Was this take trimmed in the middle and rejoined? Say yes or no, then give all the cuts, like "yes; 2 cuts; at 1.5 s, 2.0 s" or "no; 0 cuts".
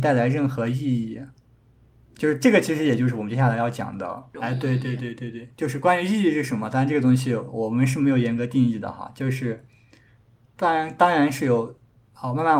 yes; 1 cut; at 4.3 s